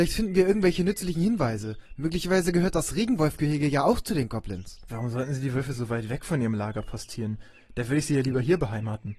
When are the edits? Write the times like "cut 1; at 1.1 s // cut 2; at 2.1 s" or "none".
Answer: cut 1; at 4.9 s